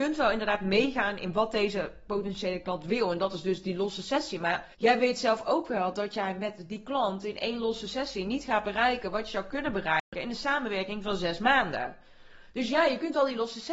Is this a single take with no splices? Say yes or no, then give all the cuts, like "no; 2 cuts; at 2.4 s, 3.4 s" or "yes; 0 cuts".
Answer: no; 1 cut; at 4.7 s